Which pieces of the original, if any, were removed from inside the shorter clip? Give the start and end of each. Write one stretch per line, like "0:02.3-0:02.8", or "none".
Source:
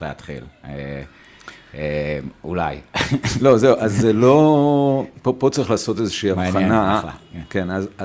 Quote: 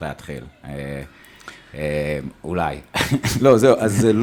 none